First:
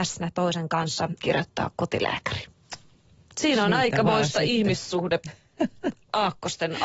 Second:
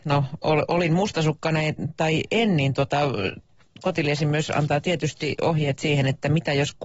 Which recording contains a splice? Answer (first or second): first